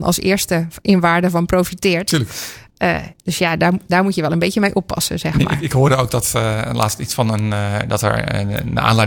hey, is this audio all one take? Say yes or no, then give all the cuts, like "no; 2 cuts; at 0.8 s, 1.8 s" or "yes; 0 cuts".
yes; 0 cuts